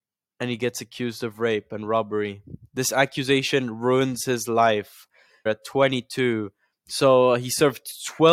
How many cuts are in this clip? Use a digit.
2